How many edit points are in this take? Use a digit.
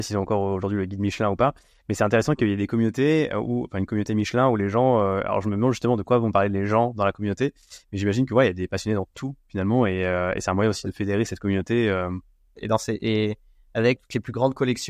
2